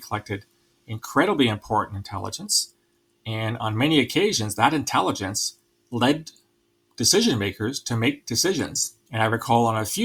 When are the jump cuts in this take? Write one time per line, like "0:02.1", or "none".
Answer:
none